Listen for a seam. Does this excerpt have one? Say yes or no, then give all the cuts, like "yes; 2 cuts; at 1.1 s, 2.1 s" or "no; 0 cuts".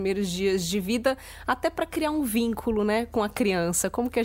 no; 0 cuts